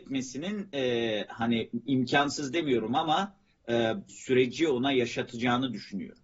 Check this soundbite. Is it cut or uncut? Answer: cut